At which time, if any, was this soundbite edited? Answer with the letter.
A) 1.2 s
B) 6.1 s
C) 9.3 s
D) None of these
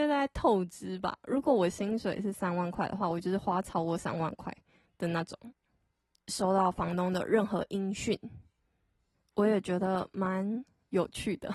B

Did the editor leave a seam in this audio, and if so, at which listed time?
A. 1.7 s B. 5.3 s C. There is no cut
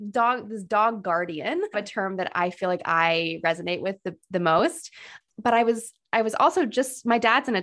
A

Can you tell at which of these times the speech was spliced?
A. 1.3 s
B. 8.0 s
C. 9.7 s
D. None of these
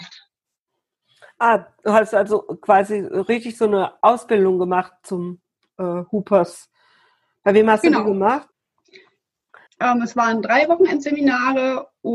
C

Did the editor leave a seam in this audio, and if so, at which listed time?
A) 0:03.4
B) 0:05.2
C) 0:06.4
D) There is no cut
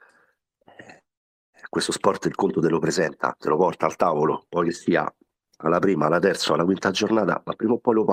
D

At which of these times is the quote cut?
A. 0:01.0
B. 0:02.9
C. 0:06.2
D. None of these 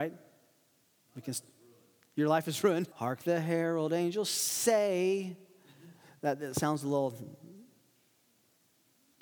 B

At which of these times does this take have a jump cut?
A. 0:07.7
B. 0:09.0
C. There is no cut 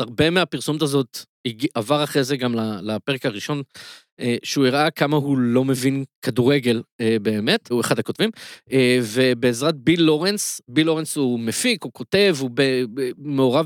A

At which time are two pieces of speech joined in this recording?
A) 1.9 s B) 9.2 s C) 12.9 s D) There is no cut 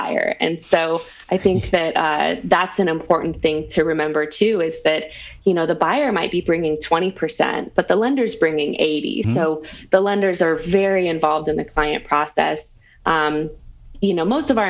B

